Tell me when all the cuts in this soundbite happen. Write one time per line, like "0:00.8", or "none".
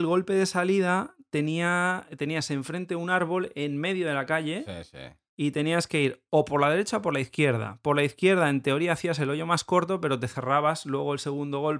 none